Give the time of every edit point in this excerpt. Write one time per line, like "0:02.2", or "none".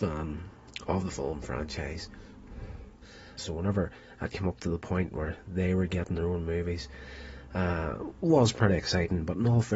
0:03.4

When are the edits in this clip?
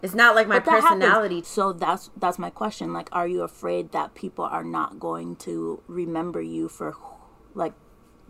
0:01.4

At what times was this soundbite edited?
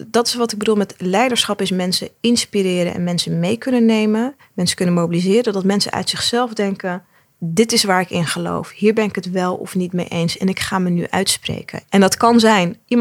0:11.8

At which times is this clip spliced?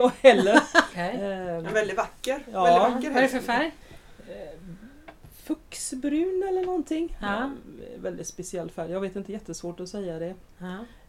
0:00.9

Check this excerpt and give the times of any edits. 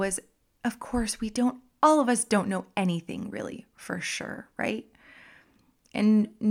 none

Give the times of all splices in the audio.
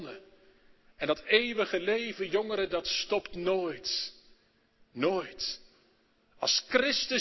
none

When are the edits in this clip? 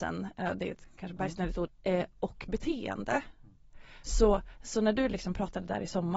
0:01.7
0:04.0

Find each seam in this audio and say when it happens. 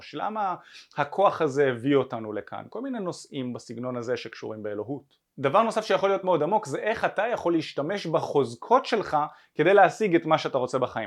0:06.2

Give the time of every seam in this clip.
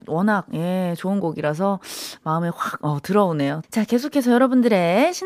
0:03.6

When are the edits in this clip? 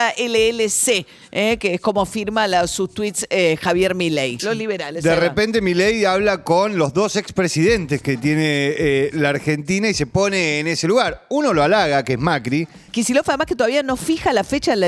0:04.4
0:12.9

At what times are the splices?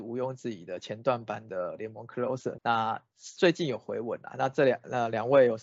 0:02.6

